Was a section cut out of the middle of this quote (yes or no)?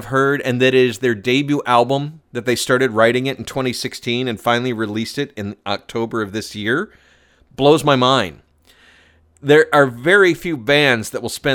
no